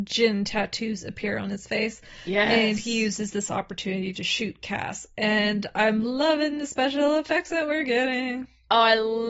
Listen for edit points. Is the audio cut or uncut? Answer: uncut